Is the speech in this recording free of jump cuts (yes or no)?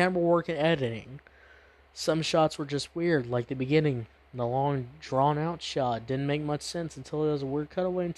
yes